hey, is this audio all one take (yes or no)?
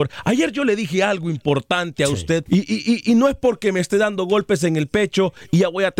no